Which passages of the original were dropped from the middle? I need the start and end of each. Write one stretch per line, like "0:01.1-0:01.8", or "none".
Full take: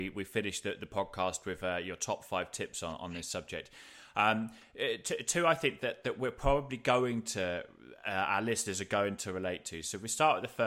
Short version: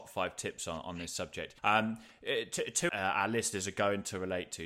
0:03.7-0:04.1
0:05.4-0:08.0